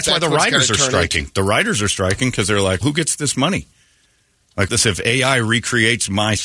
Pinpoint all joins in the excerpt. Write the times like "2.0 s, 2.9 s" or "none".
2.8 s, 4.7 s